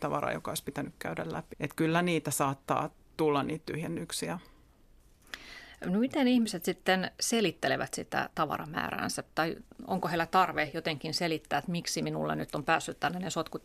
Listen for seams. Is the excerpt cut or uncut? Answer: cut